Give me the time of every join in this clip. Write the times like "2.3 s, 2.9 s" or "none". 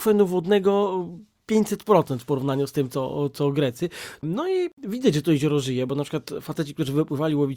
4.2 s